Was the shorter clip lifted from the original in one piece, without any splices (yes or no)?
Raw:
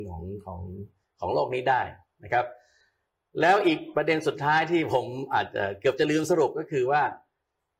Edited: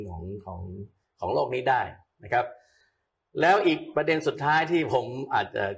yes